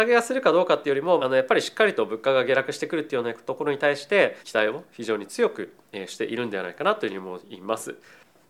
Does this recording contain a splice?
yes; 2 cuts; at 1.2 s, 4.4 s

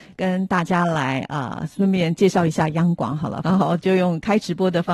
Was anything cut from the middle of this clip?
yes; 1 cut; at 3.4 s

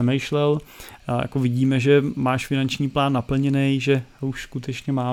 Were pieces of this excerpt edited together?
yes; 1 cut; at 1.0 s

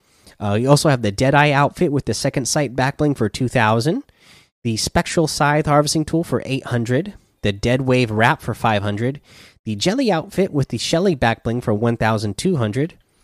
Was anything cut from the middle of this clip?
no; 0 cuts

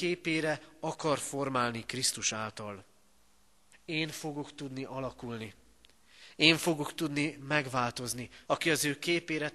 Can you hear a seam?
yes; 2 cuts; at 3.7 s, 8.5 s

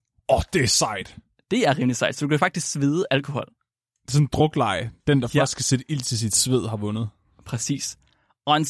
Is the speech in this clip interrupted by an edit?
no; 0 cuts

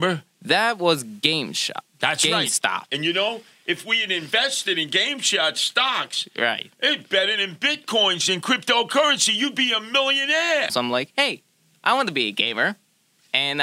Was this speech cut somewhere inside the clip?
yes; 2 cuts; at 2.9 s, 10.7 s

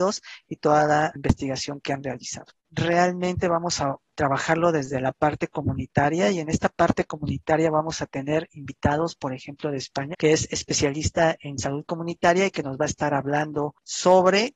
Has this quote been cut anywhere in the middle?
yes; 3 cuts; at 2.6 s, 6.4 s, 10.1 s

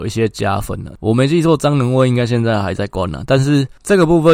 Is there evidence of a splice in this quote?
no; 0 cuts

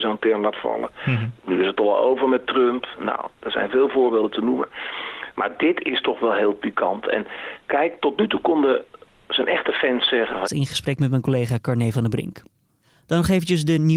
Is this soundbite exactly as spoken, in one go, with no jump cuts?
no; 1 cut; at 10.4 s

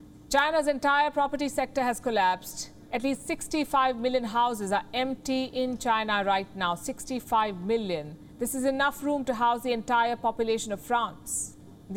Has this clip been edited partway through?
no; 0 cuts

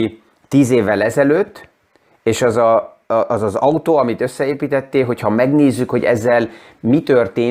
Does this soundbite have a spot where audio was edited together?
no; 0 cuts

